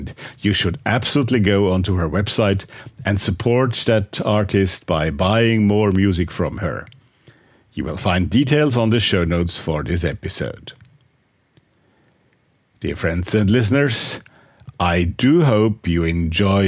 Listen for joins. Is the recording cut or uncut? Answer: uncut